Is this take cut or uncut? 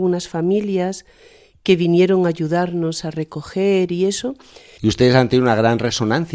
cut